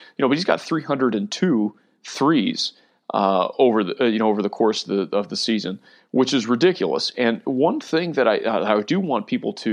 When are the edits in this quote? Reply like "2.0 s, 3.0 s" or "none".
none